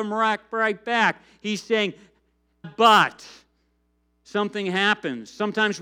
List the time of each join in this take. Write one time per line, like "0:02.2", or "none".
0:02.6